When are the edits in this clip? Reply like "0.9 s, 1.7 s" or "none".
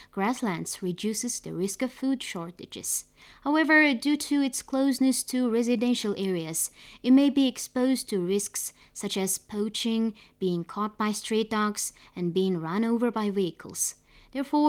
none